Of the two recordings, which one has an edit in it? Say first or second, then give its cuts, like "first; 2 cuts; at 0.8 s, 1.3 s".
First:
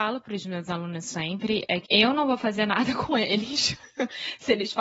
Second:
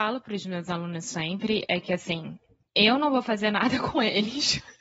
first; 1 cut; at 1.9 s